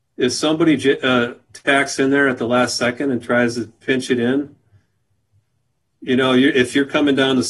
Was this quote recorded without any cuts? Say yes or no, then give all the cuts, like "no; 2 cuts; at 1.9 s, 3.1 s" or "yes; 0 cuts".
yes; 0 cuts